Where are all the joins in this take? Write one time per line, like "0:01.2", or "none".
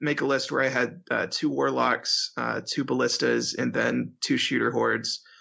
none